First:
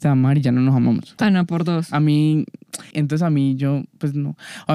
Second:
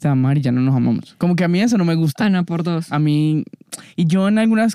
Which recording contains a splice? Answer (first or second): first